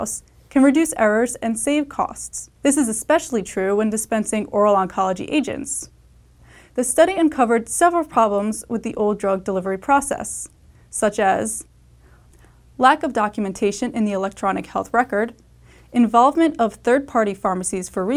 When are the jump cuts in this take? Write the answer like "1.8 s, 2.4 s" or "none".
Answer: 2.6 s